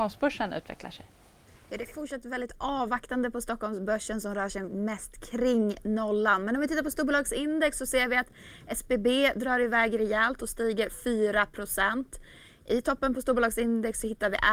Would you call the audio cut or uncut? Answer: uncut